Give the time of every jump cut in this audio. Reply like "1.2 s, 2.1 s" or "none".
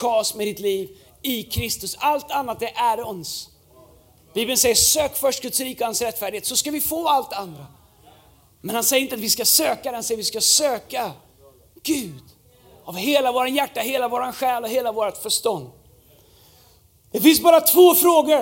none